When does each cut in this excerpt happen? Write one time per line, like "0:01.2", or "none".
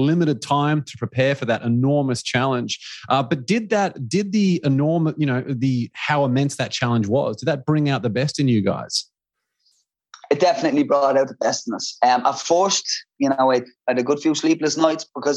none